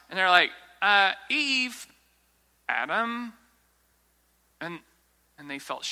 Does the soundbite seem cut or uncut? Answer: uncut